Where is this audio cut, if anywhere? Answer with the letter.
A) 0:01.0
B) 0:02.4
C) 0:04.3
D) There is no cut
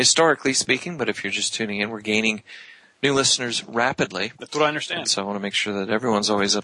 C